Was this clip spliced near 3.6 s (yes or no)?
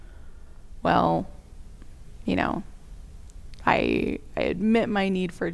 no